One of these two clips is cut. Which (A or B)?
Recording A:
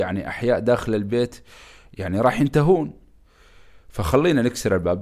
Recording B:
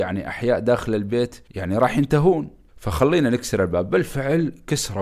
B